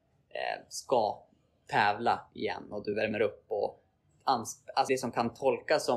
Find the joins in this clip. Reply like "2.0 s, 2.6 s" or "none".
4.9 s

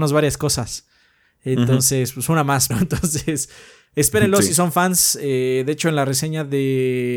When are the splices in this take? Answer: 2.7 s

